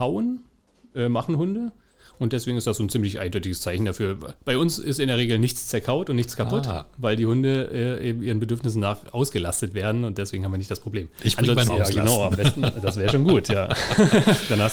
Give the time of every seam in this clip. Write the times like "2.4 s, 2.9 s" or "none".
11.7 s